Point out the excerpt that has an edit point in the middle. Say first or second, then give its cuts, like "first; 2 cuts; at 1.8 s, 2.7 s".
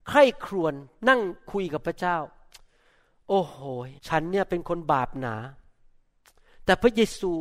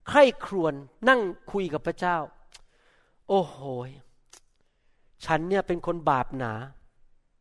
first; 1 cut; at 4.0 s